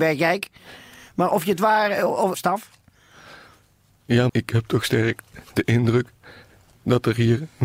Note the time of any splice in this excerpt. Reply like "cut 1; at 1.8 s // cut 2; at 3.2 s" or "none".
cut 1; at 2.3 s // cut 2; at 4.3 s